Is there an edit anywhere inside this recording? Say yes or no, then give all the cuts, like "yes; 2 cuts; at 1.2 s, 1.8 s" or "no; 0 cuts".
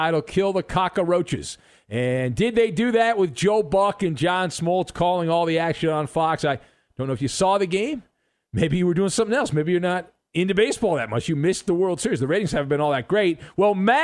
no; 0 cuts